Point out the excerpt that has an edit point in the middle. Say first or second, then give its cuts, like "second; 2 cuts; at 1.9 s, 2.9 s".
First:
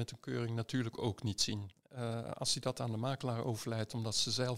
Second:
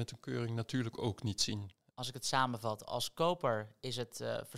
first; 1 cut; at 1.8 s